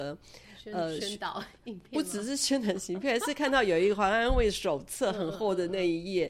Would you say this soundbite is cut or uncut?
cut